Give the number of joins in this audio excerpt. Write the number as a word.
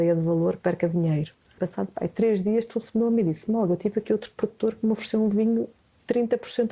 one